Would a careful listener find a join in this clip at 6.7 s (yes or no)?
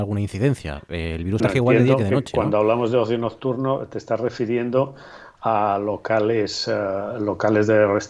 no